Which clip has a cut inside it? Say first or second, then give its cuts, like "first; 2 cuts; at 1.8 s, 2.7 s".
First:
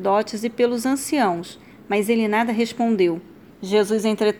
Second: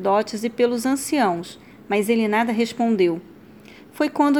first; 1 cut; at 3.5 s